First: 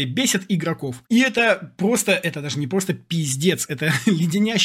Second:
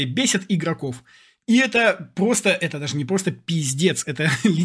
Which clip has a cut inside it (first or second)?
first